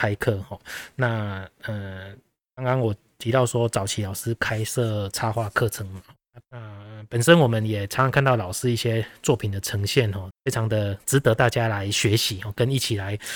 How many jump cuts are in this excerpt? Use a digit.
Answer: 2